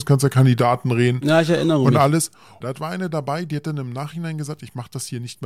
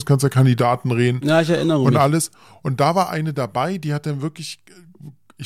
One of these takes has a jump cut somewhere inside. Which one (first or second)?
first